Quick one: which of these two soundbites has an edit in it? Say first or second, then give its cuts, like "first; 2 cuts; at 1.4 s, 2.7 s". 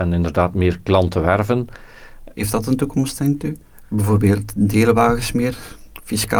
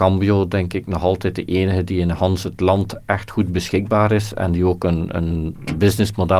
first; 2 cuts; at 2.3 s, 3.8 s